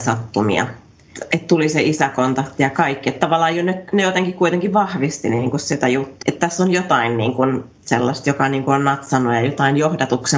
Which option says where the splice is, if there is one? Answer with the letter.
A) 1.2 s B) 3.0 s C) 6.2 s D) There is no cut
C